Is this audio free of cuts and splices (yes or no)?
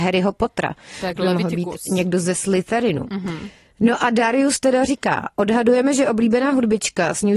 yes